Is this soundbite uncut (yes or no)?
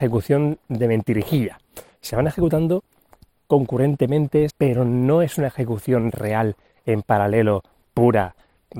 no